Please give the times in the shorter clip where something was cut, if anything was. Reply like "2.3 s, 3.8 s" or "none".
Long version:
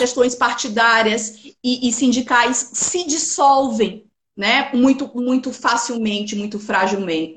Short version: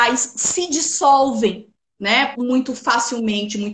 2.3 s